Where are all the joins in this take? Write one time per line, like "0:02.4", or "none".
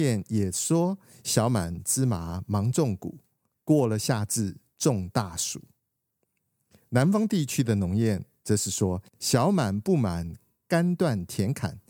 none